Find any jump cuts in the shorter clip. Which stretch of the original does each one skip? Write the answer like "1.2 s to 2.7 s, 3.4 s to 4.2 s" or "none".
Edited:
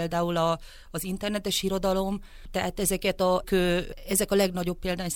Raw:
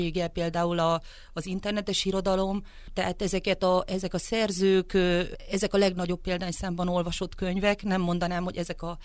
3.9 s to 4.9 s